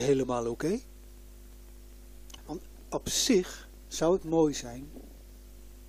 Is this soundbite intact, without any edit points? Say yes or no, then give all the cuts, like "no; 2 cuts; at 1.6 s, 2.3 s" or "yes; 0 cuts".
no; 1 cut; at 2.4 s